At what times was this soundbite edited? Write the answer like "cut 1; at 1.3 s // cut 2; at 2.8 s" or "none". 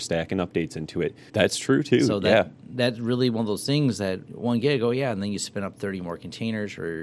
cut 1; at 1.3 s